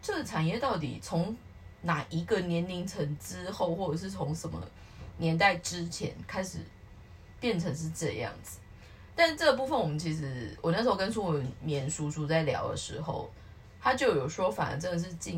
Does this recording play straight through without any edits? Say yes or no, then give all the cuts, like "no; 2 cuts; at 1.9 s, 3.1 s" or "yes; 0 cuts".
yes; 0 cuts